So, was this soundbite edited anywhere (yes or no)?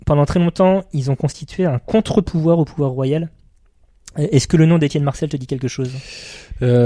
no